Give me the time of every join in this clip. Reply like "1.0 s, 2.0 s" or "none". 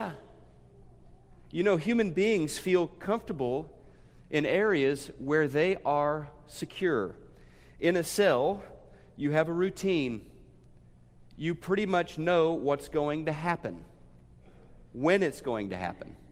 none